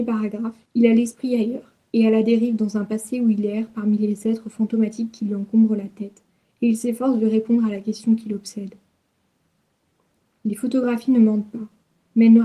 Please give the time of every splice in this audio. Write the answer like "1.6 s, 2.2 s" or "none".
none